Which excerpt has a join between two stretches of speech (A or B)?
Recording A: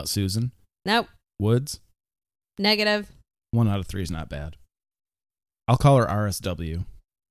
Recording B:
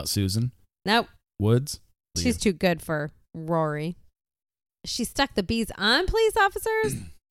B